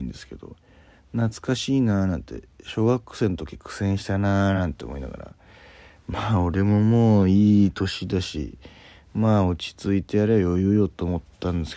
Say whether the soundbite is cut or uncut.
uncut